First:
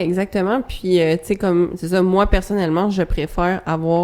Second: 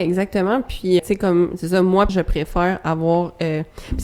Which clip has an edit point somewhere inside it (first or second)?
second